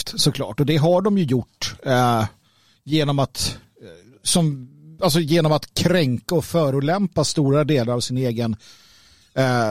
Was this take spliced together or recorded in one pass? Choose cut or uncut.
uncut